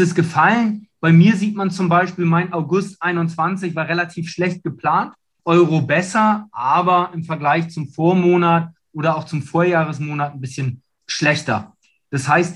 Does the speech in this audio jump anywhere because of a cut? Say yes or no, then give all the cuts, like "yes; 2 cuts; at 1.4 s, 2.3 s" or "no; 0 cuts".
yes; 2 cuts; at 5.4 s, 11.0 s